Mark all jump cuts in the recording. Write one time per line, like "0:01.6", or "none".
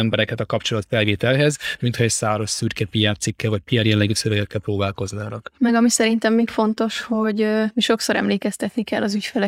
none